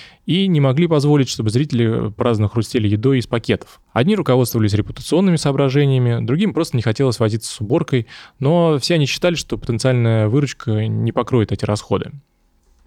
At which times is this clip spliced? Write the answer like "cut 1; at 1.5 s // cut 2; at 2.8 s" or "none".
cut 1; at 3.8 s